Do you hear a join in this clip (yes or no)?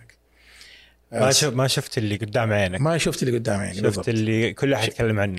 no